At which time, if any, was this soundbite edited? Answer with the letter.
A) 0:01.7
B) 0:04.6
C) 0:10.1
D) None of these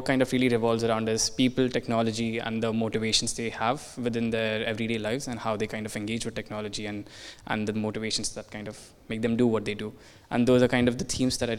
D